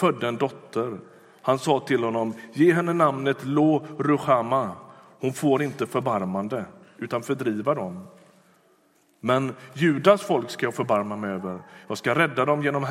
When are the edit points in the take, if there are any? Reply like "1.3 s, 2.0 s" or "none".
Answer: 7.0 s

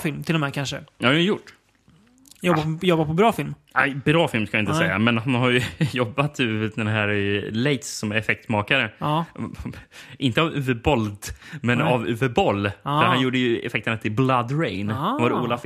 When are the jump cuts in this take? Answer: none

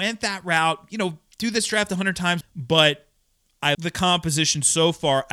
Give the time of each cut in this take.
2.4 s, 3.7 s

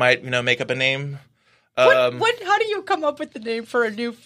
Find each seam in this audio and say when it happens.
none

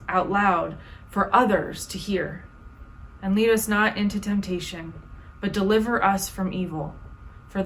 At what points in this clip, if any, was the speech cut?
3.2 s

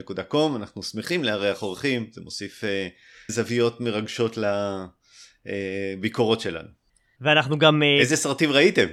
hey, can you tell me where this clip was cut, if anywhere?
3.3 s, 7.2 s

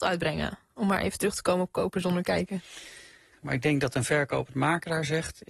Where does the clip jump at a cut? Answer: 3.3 s

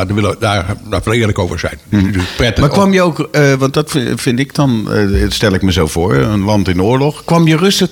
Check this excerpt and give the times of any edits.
none

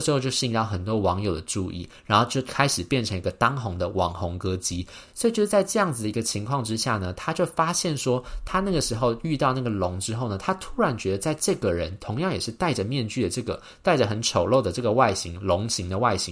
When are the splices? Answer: none

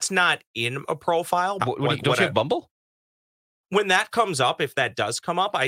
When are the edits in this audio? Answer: 1.6 s, 3.6 s

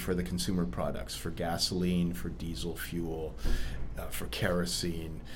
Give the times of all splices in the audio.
none

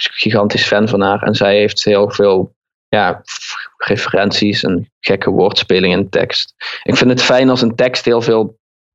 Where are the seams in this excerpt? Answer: none

